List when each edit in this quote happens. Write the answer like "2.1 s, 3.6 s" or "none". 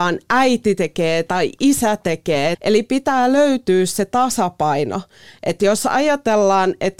2.5 s